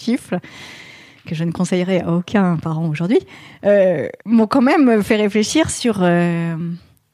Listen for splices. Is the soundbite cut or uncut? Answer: cut